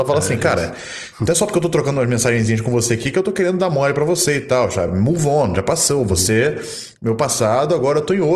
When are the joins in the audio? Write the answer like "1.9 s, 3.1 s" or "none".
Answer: none